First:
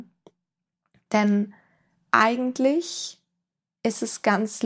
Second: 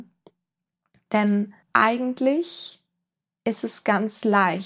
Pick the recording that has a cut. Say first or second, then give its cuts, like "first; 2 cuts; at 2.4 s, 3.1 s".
second; 1 cut; at 1.6 s